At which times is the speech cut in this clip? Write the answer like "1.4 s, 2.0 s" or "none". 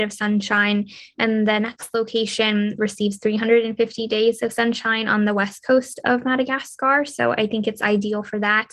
2.8 s